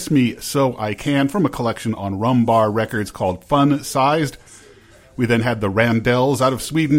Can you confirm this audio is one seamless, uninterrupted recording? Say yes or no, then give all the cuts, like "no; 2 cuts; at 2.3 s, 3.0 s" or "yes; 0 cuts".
yes; 0 cuts